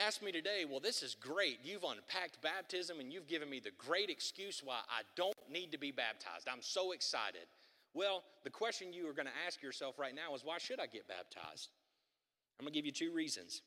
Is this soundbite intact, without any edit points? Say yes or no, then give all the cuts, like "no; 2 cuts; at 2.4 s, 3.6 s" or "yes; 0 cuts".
yes; 0 cuts